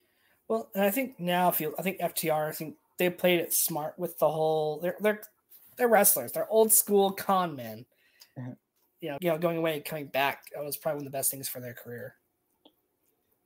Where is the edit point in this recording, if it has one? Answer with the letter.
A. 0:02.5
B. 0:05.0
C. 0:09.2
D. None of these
C